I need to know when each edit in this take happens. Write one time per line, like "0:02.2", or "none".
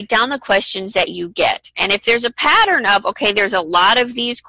0:01.7